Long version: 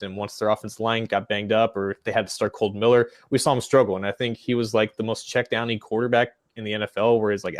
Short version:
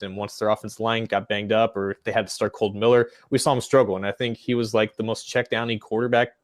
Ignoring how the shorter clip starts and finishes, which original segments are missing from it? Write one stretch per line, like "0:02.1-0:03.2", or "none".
none